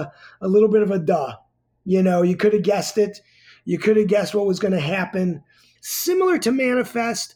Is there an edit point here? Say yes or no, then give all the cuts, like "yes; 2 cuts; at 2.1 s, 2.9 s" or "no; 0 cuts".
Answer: yes; 1 cut; at 5.7 s